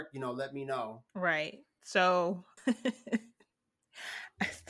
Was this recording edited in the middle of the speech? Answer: yes; 2 cuts; at 1.1 s, 2.6 s

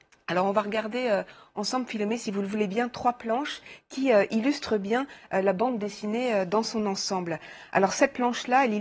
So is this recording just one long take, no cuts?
yes; 0 cuts

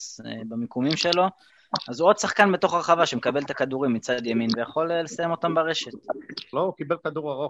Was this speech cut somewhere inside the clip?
yes; 1 cut; at 6.5 s

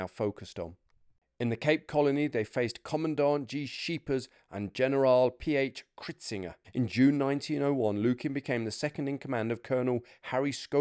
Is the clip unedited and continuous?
no; 1 cut; at 6.6 s

